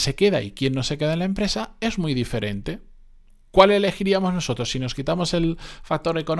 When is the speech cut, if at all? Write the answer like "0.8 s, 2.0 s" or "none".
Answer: none

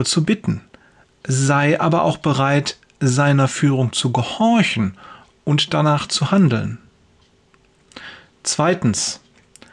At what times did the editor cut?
none

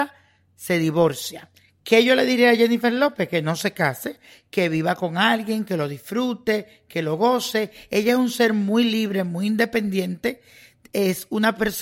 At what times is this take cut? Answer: none

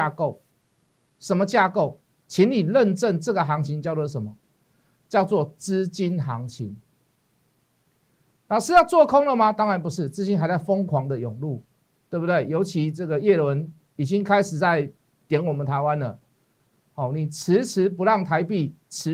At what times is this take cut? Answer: none

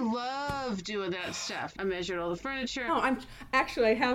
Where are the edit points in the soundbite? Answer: 1.7 s, 2.9 s

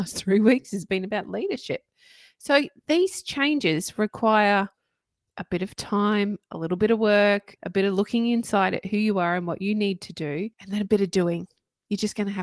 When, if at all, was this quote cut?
7.6 s, 10.5 s

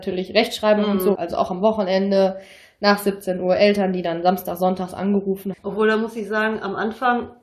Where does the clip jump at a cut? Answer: 1.1 s, 5.5 s

